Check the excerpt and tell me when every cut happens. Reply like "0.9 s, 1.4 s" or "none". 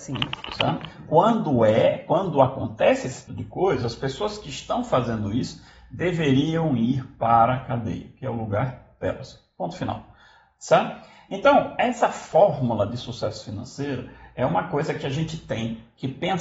3.3 s